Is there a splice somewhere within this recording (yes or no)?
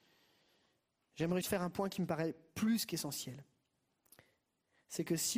yes